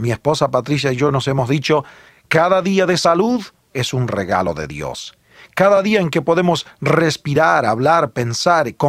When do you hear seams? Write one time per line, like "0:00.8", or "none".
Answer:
0:02.1
0:05.5